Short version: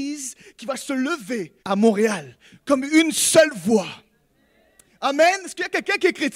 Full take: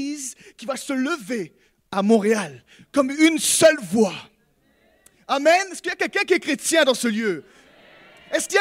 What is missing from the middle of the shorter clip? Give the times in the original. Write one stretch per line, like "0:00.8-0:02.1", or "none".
0:01.6-0:01.9